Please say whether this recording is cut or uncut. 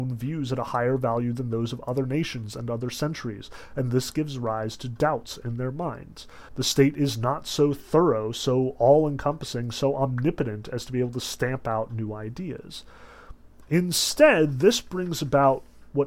cut